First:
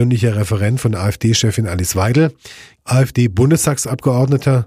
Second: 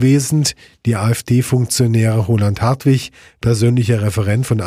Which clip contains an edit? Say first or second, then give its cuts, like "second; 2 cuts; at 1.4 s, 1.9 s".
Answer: first; 1 cut; at 2.8 s